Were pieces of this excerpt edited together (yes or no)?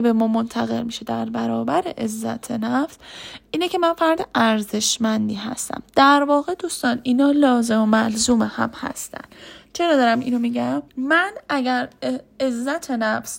yes